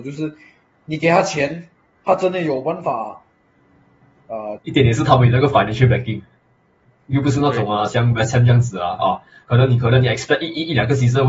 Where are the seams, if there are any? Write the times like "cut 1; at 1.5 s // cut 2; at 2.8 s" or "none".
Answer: cut 1; at 4.6 s